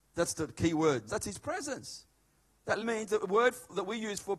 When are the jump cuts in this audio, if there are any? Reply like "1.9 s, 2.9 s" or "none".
1.1 s, 2.8 s